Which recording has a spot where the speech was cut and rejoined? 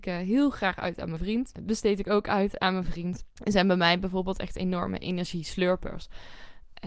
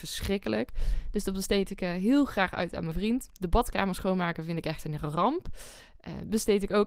first; 2 cuts; at 1.6 s, 3.3 s

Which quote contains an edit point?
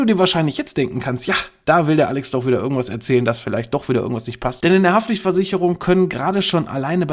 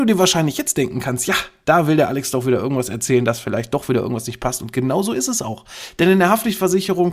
first; 1 cut; at 4.6 s

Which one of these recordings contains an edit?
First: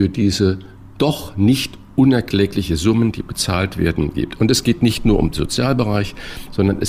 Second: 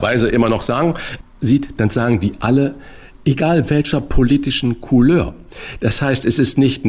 second; 1 cut; at 3.2 s

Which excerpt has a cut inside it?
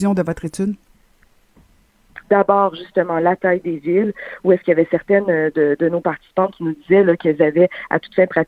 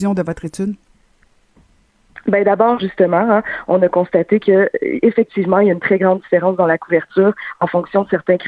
first; 1 cut; at 2.2 s

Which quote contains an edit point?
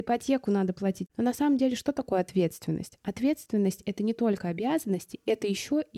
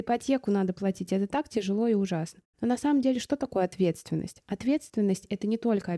first; 1 cut; at 1.1 s

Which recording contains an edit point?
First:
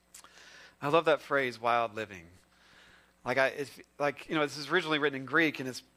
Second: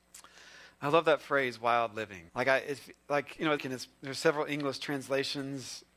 second; 2 cuts; at 2.3 s, 3.6 s

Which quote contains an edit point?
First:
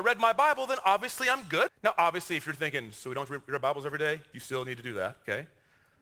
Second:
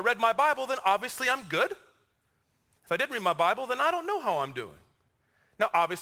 first; 2 cuts; at 1.7 s, 4.3 s

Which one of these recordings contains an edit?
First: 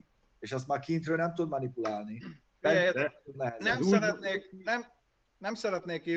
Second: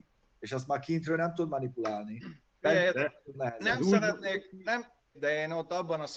second; 1 cut; at 5.1 s

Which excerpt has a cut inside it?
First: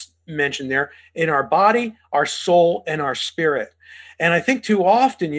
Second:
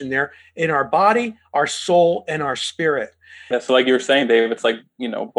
second; 1 cut; at 3.5 s

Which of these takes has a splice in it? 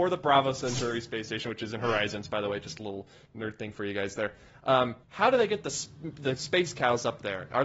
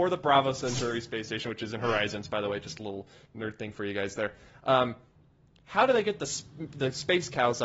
first; 1 cut; at 5.0 s

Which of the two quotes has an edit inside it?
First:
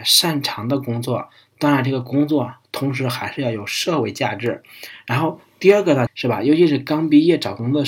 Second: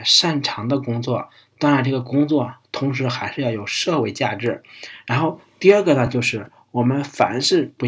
first; 1 cut; at 6.1 s

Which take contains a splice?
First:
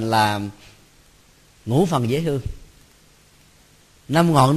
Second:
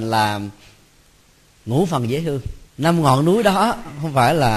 second; 1 cut; at 2.7 s

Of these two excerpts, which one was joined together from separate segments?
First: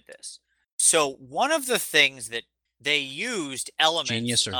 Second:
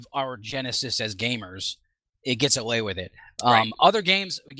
first; 1 cut; at 2.7 s

